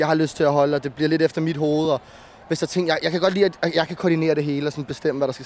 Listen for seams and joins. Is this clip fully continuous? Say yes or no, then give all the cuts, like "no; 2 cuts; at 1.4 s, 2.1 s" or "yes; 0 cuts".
yes; 0 cuts